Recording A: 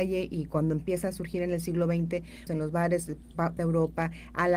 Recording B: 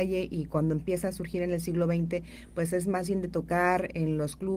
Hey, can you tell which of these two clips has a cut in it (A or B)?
A